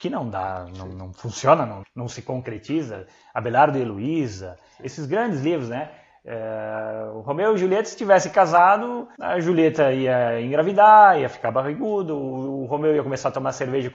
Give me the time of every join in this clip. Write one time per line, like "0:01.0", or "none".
0:01.8